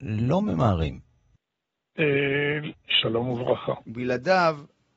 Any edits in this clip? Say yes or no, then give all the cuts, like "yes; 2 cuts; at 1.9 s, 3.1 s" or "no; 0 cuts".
yes; 2 cuts; at 2.7 s, 3.8 s